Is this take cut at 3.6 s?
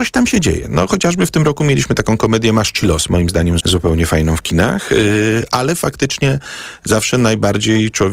yes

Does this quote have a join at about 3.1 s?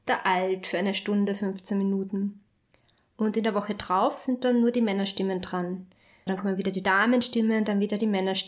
no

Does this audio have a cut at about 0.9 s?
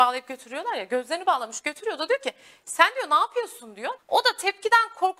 no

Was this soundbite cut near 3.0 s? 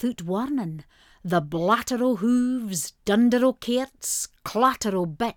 no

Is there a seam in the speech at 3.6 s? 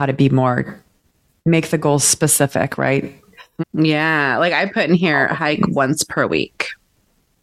yes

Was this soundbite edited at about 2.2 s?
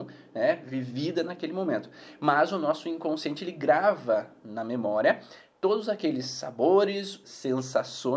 no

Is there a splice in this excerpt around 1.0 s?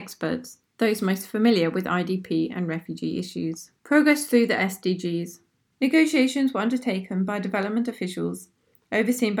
no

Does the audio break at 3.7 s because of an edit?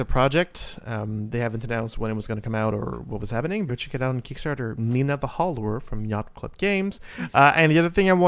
yes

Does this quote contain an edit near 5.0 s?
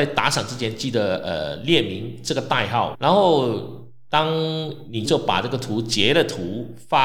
yes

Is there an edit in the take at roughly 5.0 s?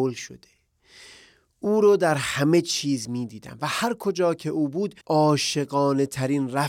yes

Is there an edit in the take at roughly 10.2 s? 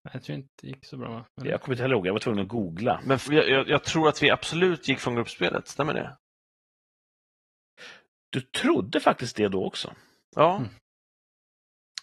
yes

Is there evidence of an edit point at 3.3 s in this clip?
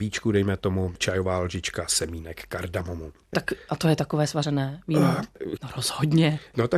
yes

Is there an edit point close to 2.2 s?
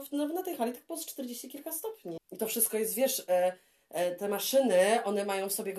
yes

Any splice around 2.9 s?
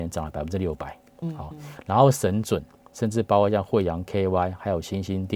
yes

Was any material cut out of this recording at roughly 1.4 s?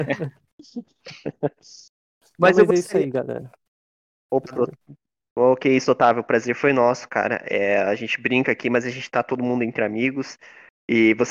no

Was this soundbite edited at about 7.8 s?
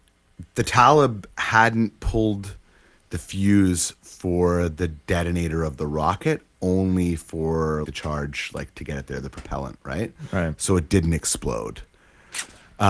yes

